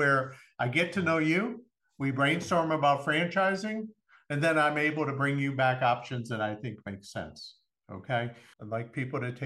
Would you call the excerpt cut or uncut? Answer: cut